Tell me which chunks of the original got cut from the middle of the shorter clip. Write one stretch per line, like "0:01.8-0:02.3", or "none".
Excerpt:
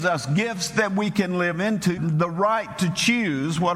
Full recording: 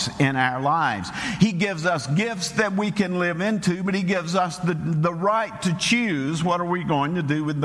0:03.8-0:04.8